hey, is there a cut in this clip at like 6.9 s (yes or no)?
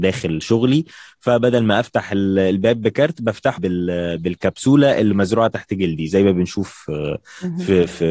no